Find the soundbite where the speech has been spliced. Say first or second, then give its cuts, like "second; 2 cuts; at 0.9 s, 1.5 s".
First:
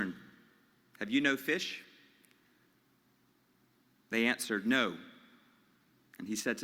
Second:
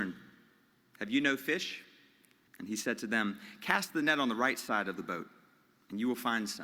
second; 1 cut; at 2.5 s